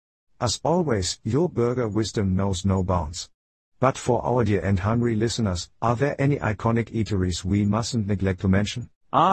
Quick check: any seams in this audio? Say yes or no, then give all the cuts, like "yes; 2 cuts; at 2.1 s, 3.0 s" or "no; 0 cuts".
no; 0 cuts